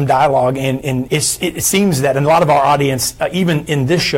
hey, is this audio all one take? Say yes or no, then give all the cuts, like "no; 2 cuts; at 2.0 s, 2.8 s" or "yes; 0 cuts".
no; 1 cut; at 1.1 s